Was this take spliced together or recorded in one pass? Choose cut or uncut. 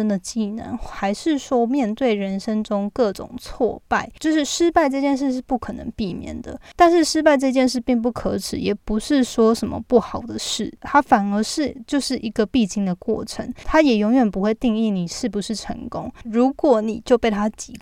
cut